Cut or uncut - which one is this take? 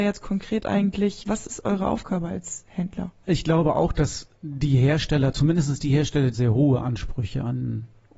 cut